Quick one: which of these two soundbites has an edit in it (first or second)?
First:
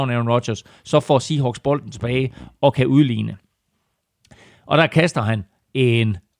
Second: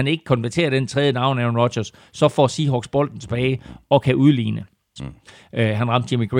second